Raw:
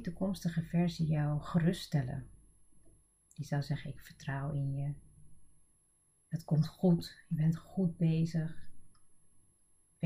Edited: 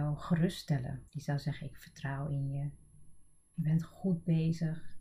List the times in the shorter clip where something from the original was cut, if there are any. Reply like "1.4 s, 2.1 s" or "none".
1.1 s, 3.5 s